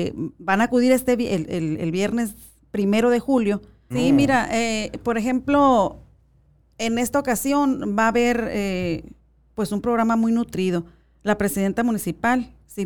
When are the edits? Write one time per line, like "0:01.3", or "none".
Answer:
0:03.9